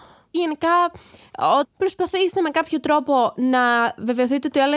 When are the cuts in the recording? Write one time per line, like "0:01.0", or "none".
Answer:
0:01.6